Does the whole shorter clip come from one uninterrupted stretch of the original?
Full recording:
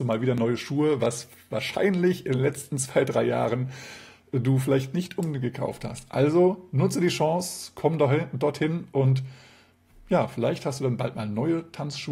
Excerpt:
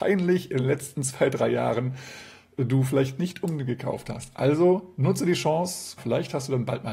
no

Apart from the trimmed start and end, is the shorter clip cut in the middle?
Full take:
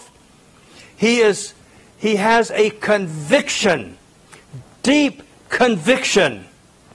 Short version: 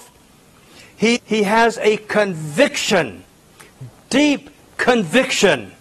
yes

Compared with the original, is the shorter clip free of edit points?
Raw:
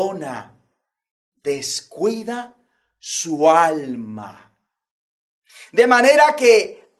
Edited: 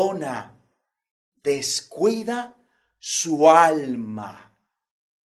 yes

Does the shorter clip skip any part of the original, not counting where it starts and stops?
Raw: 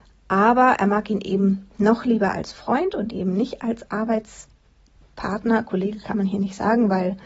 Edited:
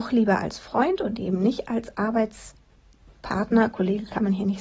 no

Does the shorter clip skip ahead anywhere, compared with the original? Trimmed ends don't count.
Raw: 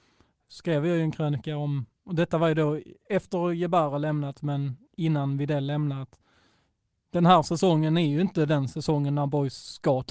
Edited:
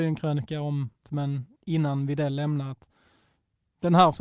yes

